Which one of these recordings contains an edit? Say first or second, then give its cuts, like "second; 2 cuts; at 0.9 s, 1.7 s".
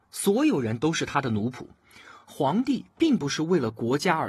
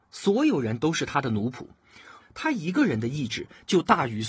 second; 1 cut; at 2.2 s